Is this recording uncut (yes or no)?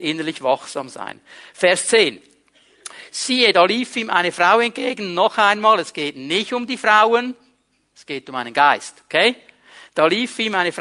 yes